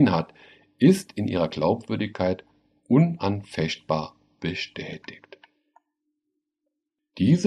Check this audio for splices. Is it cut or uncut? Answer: uncut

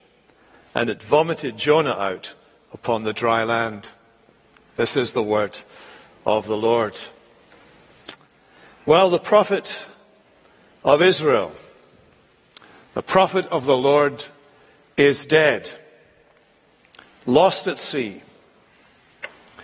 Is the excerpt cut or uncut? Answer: uncut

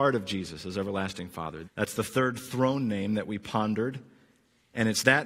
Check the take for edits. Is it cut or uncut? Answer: cut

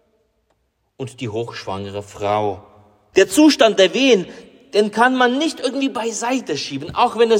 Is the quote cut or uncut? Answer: cut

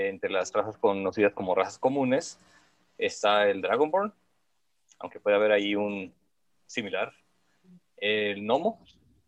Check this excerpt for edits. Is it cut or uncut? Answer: uncut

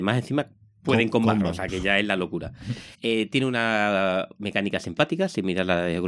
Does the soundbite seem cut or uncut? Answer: cut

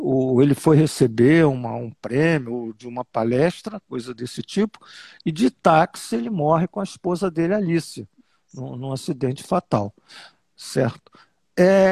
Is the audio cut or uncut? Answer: uncut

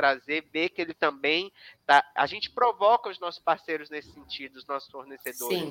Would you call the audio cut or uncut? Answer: cut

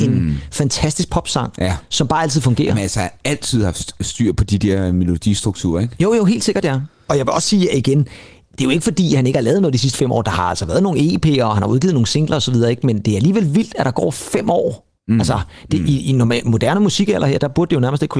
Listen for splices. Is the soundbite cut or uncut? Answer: uncut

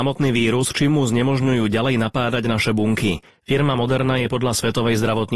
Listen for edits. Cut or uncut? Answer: cut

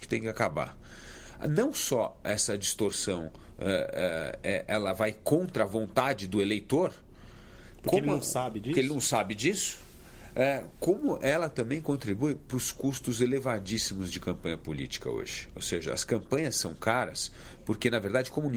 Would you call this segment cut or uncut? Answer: uncut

